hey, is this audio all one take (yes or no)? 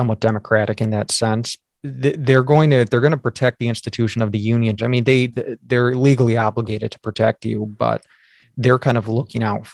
no